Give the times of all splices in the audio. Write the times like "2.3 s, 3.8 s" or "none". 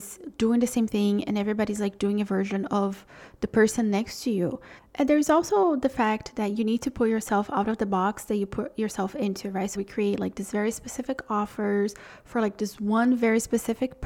4.8 s, 9.7 s